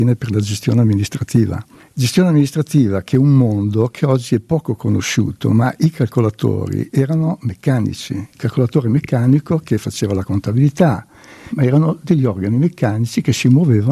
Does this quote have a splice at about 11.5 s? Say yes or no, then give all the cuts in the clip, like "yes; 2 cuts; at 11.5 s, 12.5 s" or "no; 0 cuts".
yes; 2 cuts; at 8.3 s, 11.5 s